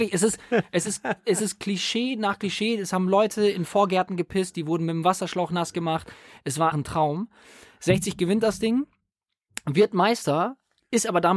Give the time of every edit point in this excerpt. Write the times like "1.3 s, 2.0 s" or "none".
6.7 s